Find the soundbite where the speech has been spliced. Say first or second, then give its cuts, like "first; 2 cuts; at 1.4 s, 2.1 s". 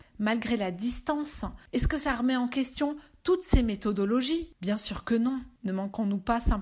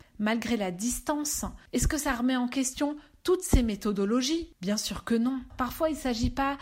second; 1 cut; at 5.5 s